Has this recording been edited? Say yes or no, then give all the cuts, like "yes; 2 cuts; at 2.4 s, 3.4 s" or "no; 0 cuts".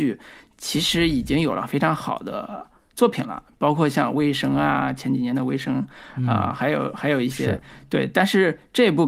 no; 0 cuts